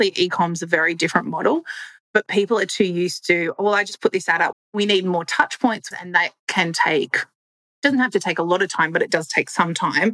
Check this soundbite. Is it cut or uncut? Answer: cut